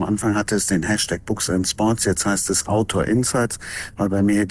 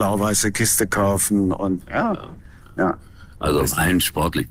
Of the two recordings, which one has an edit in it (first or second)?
second